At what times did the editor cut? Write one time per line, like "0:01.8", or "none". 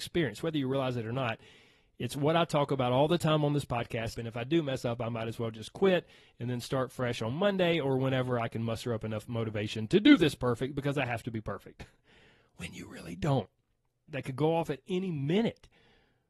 0:04.1
0:14.1